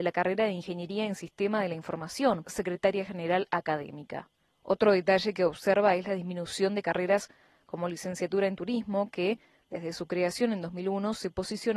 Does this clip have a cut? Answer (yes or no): yes